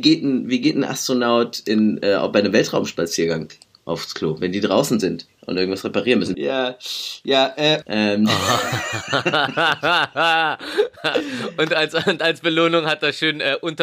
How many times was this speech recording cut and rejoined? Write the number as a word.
two